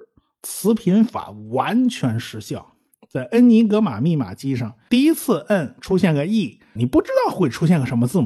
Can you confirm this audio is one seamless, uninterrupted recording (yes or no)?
no